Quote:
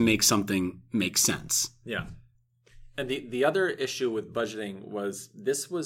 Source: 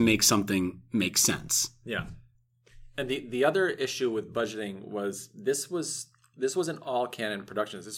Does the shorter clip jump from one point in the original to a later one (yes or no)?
no